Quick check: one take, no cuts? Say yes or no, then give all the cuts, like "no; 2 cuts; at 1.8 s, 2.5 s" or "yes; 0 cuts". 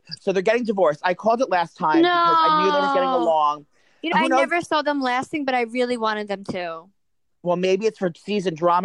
no; 1 cut; at 4.1 s